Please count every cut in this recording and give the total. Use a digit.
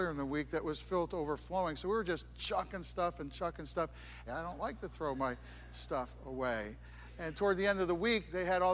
1